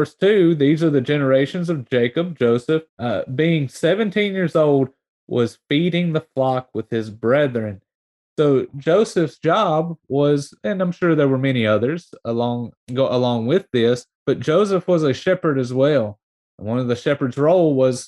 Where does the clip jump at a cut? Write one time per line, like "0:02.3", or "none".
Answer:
0:02.9
0:12.8
0:14.1